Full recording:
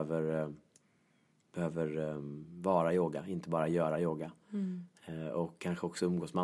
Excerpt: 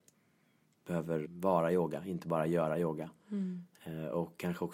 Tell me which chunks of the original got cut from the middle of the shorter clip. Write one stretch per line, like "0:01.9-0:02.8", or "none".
0:01.9-0:02.5

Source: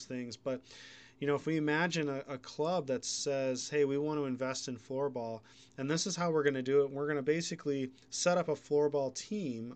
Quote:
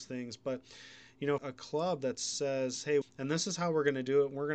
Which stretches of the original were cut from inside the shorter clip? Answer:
0:01.4-0:02.2
0:03.9-0:05.6

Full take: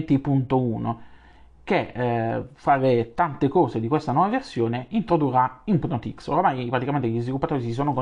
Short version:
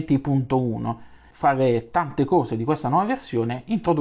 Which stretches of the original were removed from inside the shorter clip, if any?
0:01.3-0:02.5

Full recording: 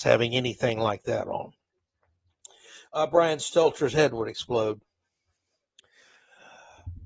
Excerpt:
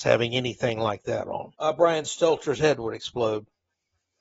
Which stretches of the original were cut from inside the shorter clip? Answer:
0:01.5-0:02.9

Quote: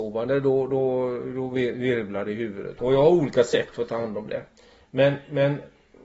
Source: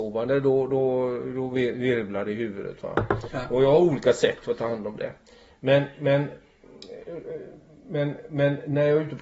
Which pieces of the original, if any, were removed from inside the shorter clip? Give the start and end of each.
0:02.8-0:03.5

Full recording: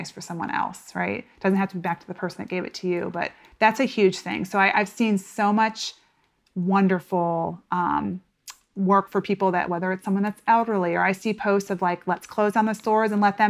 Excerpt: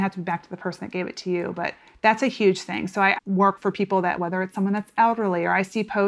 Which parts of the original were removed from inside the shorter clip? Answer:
0:04.7-0:08.7

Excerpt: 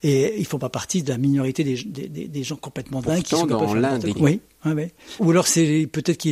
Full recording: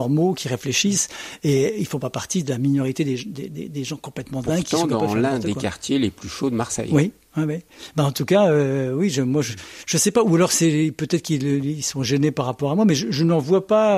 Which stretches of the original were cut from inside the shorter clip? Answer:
0:05.5-0:06.9
0:07.9-0:10.2

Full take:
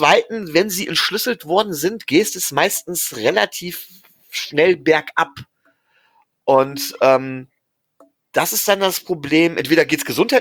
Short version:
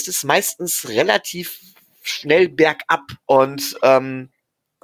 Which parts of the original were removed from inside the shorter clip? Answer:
0:05.5-0:06.4

